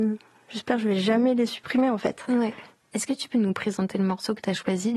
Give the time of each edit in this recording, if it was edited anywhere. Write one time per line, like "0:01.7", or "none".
none